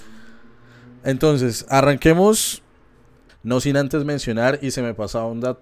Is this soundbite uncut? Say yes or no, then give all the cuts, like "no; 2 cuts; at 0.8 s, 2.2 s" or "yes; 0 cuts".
no; 1 cut; at 3.3 s